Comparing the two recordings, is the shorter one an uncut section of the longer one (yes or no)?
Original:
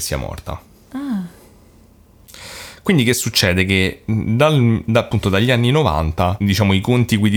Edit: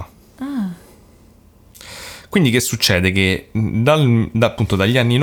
yes